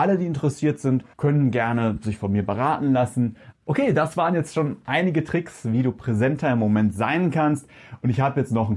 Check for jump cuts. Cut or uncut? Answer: cut